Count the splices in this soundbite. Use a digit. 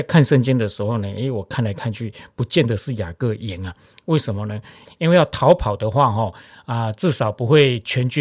1